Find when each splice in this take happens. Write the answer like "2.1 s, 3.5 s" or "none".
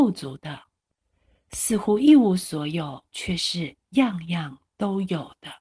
3.1 s